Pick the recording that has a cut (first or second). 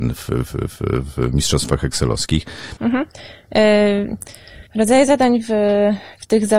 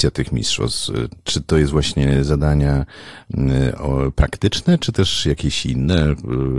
first